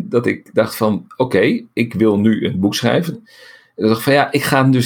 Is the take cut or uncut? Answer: cut